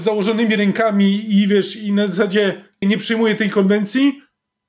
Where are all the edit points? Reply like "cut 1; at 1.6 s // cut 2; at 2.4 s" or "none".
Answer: cut 1; at 2.8 s